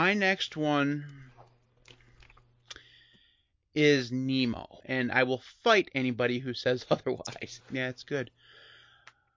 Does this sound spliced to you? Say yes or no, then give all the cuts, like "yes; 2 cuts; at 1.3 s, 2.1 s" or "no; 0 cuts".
yes; 2 cuts; at 4.8 s, 7.6 s